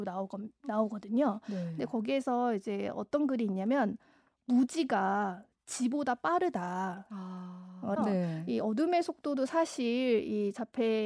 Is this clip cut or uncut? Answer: cut